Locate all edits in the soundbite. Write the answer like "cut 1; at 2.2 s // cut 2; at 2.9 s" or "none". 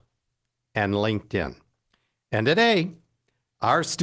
none